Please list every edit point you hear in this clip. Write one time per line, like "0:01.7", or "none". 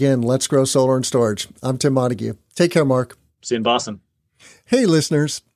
0:03.4